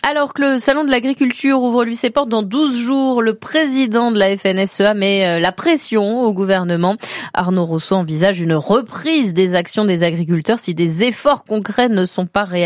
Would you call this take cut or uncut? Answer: uncut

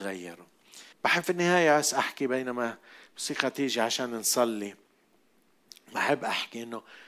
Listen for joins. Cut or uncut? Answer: cut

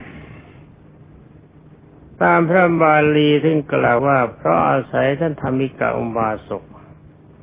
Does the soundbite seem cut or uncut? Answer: cut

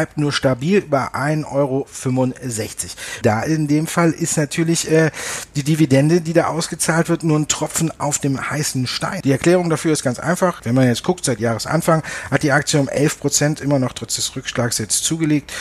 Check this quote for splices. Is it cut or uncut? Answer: cut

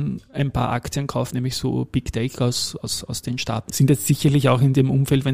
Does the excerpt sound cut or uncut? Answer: cut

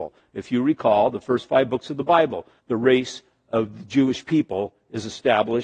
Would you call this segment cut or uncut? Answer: cut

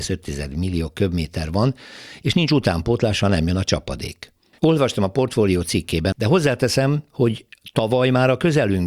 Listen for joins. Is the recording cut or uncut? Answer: cut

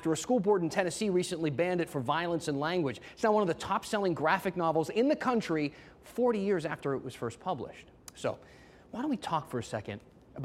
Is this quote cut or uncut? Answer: uncut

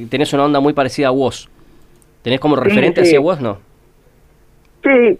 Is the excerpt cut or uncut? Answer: uncut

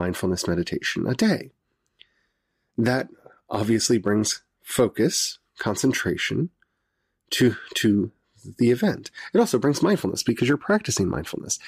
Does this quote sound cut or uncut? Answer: uncut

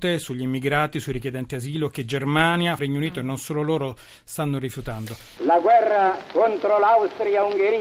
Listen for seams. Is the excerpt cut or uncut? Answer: cut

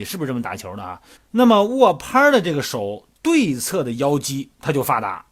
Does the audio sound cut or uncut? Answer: cut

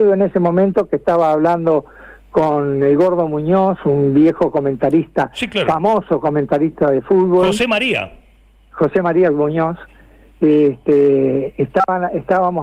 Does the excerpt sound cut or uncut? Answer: uncut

